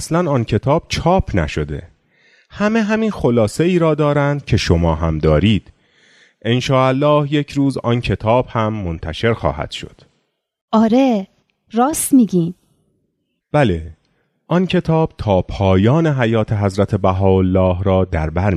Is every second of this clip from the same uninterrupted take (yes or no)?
no